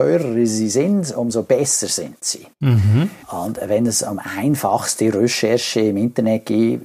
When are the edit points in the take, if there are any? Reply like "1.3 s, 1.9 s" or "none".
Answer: 3.2 s

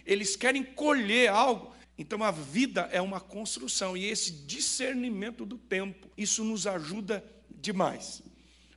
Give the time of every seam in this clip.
1.8 s, 6.1 s

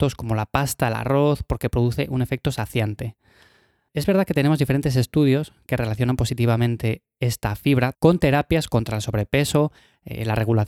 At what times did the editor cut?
7.9 s

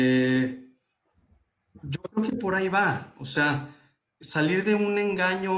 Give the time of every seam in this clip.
4.2 s

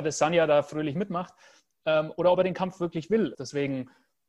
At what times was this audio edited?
3.3 s

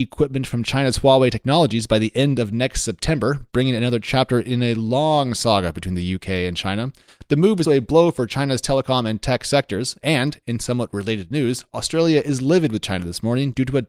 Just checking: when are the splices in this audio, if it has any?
3.5 s, 7.6 s

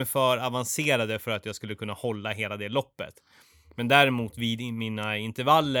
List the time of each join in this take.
none

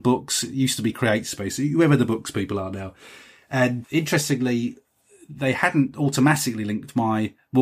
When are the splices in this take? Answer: 3.8 s

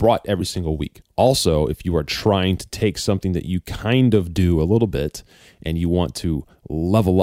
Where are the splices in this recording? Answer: 1.0 s

